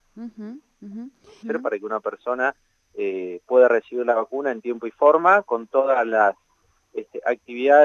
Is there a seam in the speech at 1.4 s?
yes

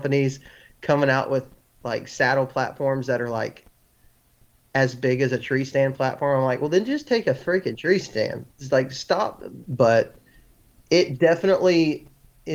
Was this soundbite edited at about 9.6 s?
yes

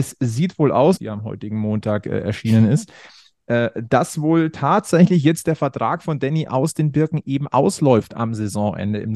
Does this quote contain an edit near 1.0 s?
yes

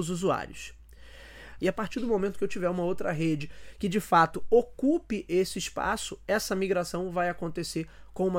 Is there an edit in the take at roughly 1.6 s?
yes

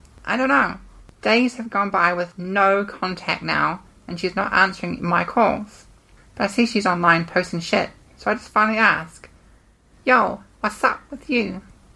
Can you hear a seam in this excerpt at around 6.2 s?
yes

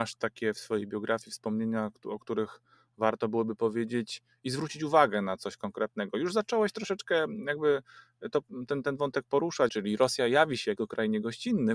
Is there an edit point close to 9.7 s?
yes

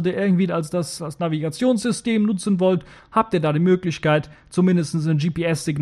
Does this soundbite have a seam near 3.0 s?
no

